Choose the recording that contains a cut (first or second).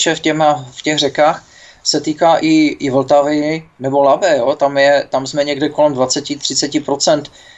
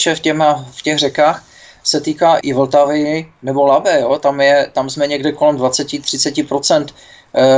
second